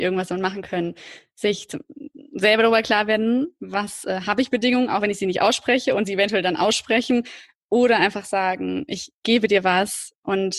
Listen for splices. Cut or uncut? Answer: cut